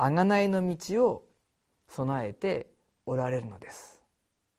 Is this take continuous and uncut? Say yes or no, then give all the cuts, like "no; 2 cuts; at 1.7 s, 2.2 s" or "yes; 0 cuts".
yes; 0 cuts